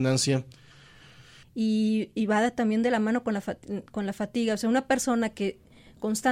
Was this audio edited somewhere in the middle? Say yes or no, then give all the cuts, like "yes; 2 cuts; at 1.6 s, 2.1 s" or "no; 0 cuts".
yes; 1 cut; at 1.4 s